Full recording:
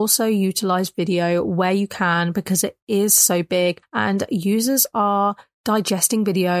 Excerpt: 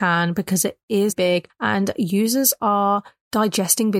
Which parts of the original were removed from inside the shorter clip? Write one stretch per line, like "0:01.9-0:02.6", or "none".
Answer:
0:03.1-0:03.4